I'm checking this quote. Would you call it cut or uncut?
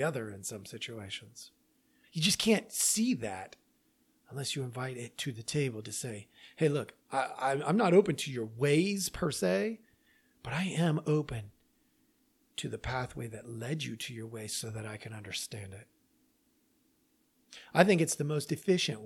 uncut